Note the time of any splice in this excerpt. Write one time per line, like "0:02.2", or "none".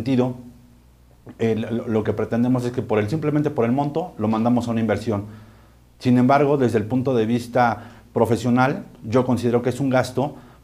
0:02.0